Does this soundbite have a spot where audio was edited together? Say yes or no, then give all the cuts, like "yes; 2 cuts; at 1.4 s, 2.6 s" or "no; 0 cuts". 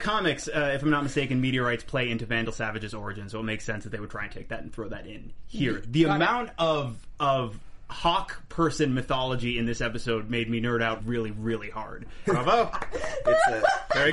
yes; 2 cuts; at 11.0 s, 12.2 s